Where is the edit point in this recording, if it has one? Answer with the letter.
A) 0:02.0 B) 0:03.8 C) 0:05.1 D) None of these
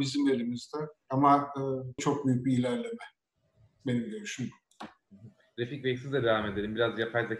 A